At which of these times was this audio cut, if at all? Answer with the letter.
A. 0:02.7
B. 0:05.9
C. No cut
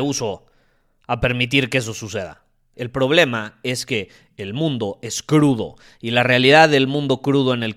A